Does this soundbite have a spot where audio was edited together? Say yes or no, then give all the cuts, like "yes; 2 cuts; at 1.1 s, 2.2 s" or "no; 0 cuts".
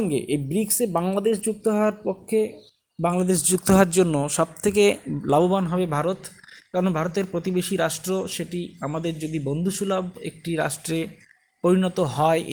no; 0 cuts